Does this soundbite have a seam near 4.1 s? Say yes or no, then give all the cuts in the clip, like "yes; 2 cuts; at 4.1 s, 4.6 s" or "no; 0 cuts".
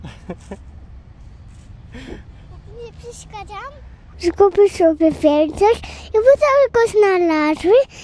yes; 1 cut; at 4.1 s